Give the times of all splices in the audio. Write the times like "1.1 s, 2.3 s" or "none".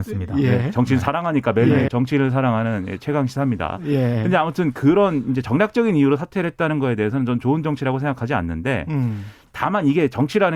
1.9 s